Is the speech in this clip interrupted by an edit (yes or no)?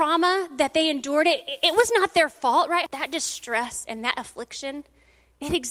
yes